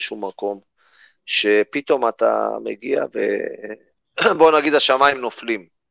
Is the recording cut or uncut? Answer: uncut